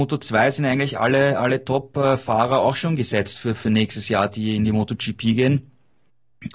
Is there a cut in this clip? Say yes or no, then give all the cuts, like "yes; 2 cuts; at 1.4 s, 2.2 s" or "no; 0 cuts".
no; 0 cuts